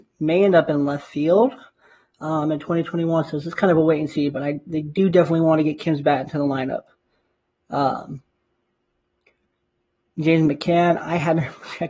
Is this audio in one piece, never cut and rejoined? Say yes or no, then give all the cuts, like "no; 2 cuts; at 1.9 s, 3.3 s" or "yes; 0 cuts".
yes; 0 cuts